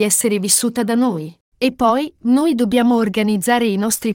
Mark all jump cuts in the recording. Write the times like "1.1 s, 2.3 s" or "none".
none